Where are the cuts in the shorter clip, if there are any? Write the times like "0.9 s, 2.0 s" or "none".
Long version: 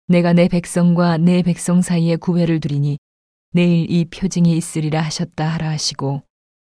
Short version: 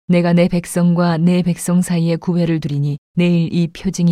3.0 s